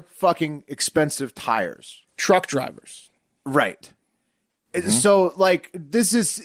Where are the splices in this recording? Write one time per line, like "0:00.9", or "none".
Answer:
0:02.1